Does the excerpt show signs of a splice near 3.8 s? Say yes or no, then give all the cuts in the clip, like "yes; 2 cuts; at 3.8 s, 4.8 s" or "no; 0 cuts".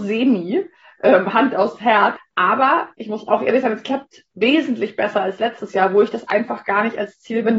no; 1 cut; at 2.2 s